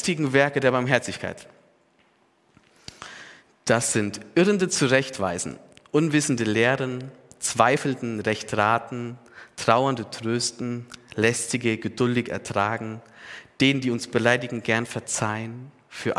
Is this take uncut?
yes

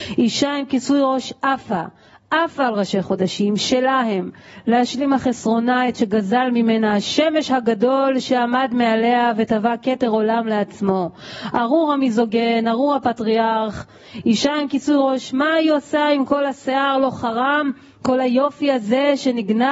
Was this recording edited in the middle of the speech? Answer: no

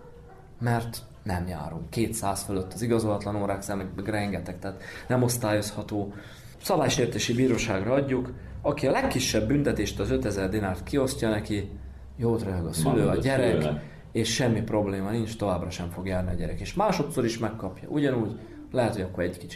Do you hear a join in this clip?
no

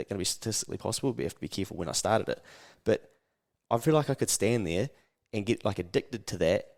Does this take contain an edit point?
no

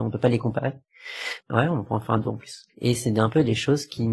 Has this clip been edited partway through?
yes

